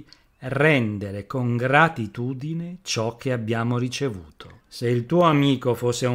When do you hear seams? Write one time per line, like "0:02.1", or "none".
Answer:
0:04.6